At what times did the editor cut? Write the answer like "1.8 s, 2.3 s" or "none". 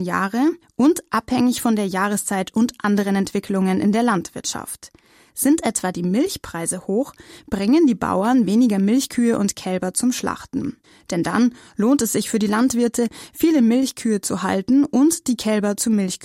none

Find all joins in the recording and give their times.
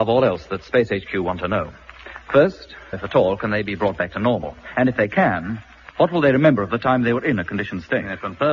2.9 s

